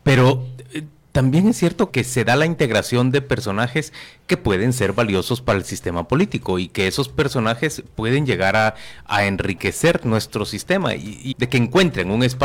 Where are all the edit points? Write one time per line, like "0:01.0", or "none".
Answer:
0:01.9
0:11.3